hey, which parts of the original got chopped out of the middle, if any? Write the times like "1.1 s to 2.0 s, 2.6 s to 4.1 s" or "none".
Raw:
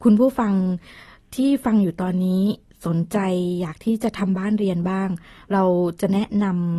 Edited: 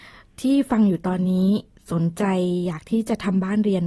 none